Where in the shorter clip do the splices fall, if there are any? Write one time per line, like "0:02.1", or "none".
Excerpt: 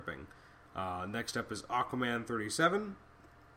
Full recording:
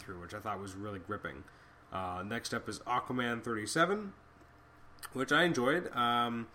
none